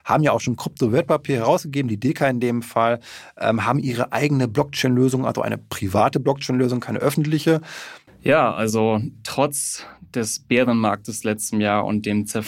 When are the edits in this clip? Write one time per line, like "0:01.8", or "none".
0:08.1